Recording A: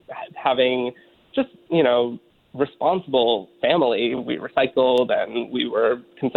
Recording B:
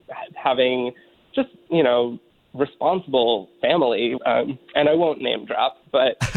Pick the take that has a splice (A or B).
B